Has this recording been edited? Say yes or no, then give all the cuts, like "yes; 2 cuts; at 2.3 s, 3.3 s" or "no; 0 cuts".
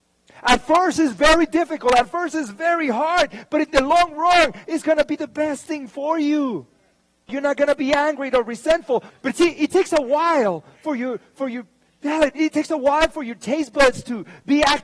yes; 2 cuts; at 7.3 s, 9.1 s